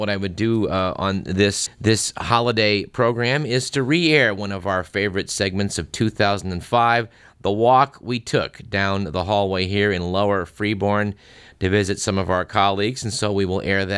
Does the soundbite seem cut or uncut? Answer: cut